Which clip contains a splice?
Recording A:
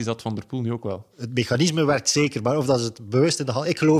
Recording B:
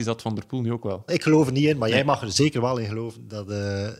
B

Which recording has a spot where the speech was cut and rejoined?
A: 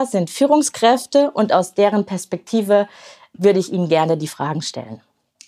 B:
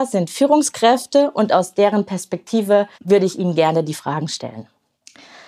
B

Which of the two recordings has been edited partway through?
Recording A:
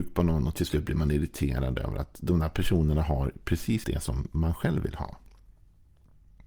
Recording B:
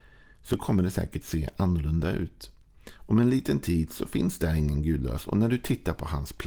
A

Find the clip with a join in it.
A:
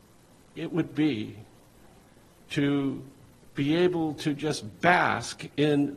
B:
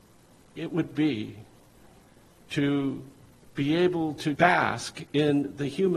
B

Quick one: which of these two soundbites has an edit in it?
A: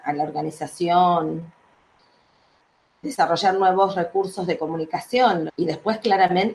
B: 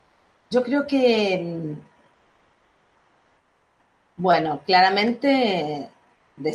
A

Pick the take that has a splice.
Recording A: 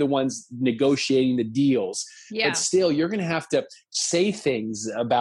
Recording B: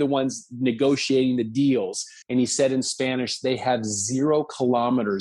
B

